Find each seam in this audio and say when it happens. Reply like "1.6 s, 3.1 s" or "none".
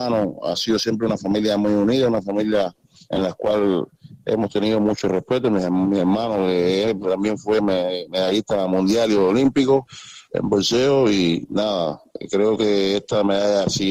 none